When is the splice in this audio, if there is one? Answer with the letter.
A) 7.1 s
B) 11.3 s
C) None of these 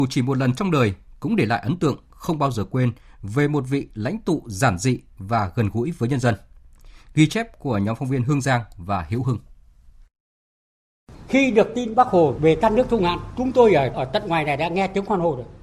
C